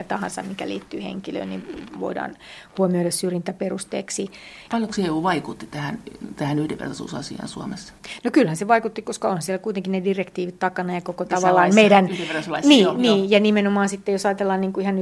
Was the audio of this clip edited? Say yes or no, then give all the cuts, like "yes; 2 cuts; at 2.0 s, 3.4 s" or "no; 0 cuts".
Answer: no; 0 cuts